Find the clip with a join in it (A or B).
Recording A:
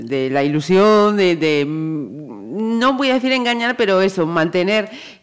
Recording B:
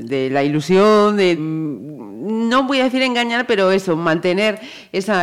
B